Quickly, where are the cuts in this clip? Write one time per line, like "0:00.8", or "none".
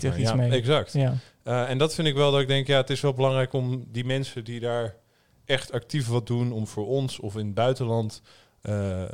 none